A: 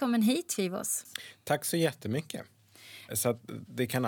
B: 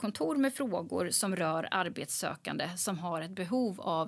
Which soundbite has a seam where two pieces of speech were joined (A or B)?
A